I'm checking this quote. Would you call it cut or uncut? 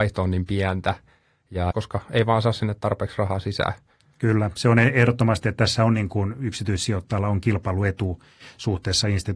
cut